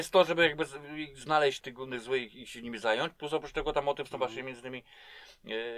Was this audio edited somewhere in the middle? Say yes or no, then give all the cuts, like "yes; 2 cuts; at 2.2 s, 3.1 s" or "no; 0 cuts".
yes; 1 cut; at 1.6 s